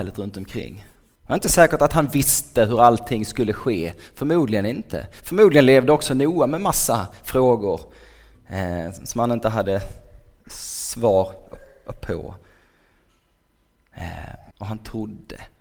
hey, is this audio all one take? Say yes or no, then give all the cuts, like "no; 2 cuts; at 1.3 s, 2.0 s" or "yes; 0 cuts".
no; 2 cuts; at 1.1 s, 14.5 s